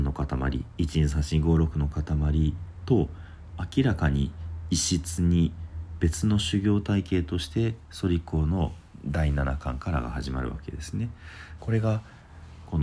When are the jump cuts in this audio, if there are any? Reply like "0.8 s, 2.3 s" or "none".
11.6 s